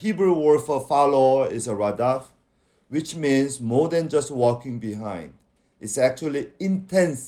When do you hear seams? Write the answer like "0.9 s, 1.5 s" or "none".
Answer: none